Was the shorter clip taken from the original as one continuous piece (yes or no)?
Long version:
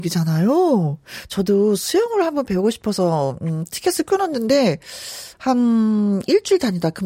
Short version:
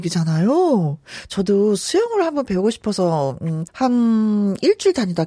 no